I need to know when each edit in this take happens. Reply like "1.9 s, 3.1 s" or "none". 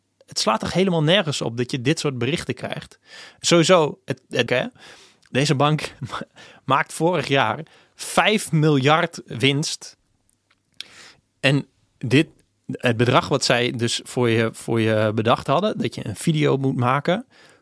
4.5 s